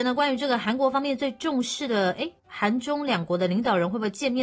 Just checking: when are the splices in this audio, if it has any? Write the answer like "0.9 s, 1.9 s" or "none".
none